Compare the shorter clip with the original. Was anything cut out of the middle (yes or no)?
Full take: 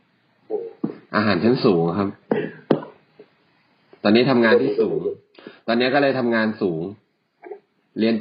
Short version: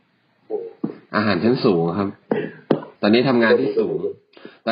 yes